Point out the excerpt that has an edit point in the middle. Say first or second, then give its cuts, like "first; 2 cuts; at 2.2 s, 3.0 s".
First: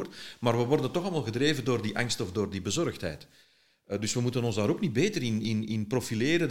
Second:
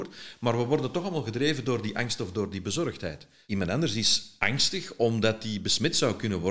second; 1 cut; at 3.4 s